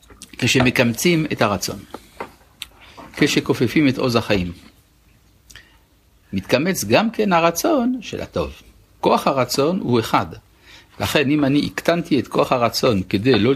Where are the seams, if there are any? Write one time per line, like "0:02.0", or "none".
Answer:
0:06.2
0:09.0